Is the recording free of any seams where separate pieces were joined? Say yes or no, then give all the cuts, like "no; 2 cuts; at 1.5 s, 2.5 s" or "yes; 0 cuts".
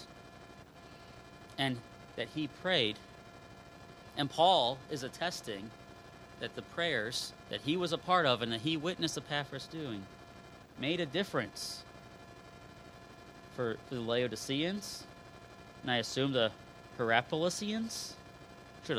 no; 1 cut; at 13.8 s